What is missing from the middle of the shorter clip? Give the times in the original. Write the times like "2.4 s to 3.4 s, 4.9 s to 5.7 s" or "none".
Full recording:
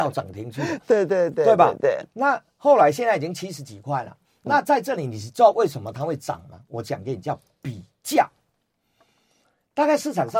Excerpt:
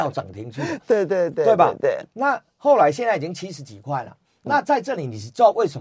none